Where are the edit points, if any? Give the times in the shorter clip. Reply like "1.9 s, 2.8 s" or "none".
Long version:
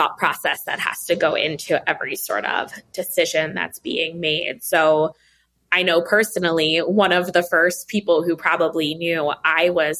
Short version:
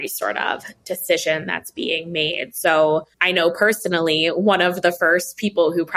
3.1 s